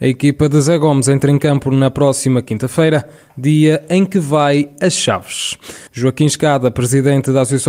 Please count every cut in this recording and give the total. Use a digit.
1